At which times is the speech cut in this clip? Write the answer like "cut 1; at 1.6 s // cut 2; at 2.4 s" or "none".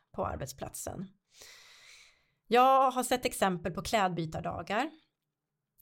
none